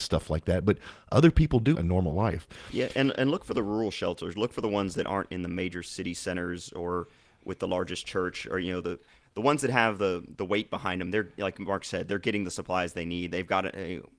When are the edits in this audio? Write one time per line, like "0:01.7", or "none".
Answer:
0:01.7